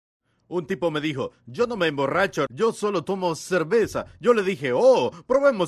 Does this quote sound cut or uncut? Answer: cut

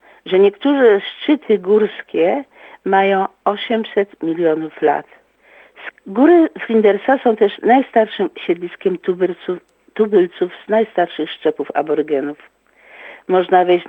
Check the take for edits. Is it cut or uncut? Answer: cut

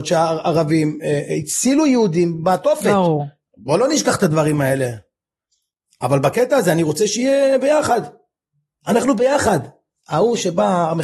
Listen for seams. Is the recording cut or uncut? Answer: uncut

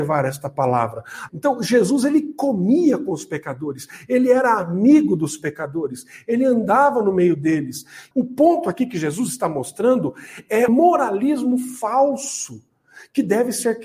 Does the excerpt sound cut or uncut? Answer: cut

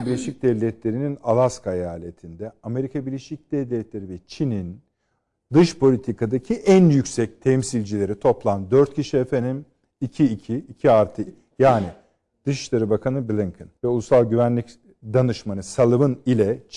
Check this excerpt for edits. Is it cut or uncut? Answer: cut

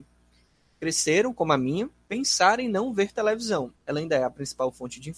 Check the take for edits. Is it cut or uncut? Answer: cut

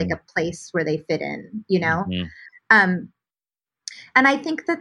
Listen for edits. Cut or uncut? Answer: uncut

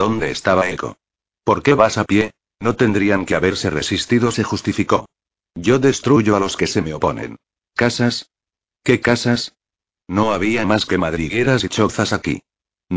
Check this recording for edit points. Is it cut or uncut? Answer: cut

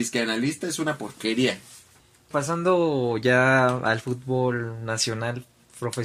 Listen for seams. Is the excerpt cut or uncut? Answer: cut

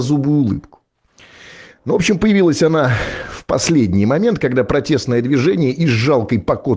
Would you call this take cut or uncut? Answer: uncut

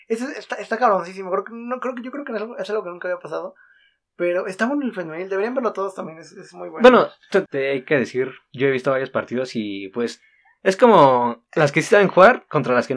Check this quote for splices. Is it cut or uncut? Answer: cut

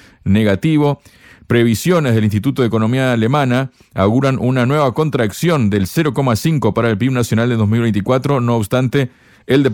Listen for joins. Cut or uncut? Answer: uncut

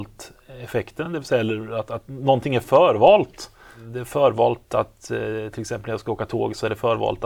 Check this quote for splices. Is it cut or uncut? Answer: uncut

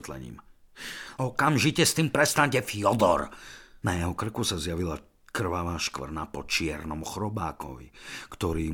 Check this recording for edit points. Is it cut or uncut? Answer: cut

